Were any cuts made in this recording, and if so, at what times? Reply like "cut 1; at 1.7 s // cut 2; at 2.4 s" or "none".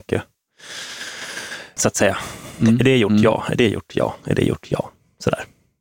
cut 1; at 1.8 s